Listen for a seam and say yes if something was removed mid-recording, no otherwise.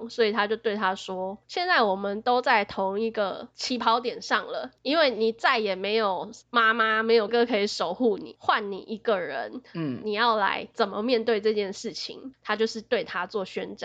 yes